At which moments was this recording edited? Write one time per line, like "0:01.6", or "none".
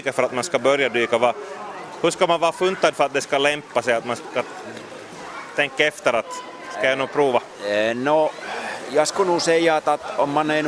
none